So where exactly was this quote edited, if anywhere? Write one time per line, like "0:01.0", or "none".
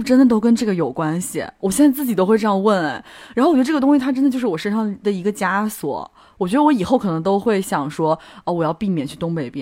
none